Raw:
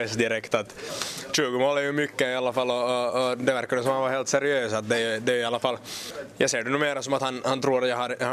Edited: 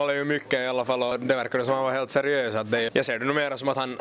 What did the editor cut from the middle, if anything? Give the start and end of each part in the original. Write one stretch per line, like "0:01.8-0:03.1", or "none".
0:02.8-0:03.3
0:05.1-0:06.3